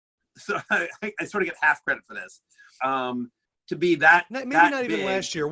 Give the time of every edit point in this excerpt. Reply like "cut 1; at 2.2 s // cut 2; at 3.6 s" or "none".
cut 1; at 2.8 s